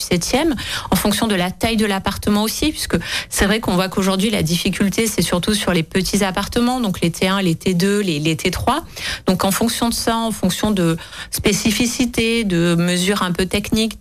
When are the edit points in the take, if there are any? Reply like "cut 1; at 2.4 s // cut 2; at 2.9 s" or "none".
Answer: none